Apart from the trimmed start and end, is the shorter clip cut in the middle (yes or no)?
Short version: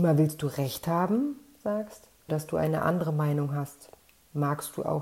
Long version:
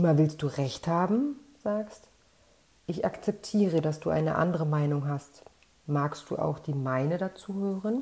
yes